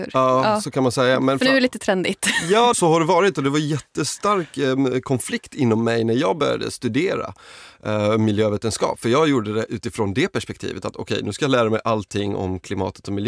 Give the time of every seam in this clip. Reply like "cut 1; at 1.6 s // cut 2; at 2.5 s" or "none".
cut 1; at 2.7 s